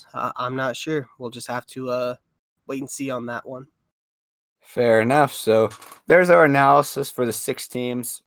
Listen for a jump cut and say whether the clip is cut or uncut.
uncut